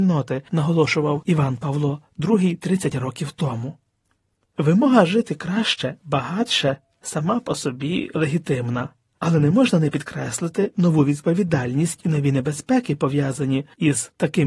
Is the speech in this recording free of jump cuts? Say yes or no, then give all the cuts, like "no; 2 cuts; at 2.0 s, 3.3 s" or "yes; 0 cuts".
yes; 0 cuts